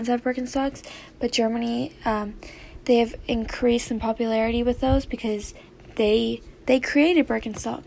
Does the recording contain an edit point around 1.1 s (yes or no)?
no